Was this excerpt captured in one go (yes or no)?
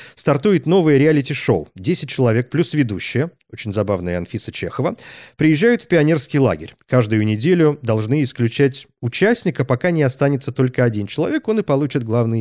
yes